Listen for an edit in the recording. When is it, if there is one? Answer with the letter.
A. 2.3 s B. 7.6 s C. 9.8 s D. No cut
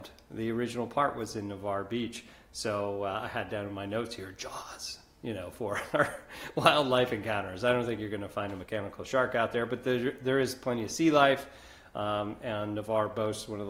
D